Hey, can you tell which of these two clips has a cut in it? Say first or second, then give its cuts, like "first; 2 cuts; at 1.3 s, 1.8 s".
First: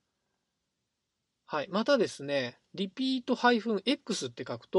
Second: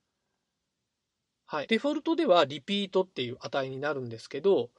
second; 1 cut; at 1.7 s